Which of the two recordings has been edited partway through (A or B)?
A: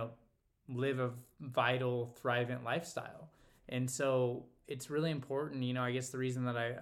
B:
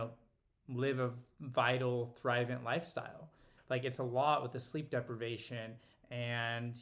B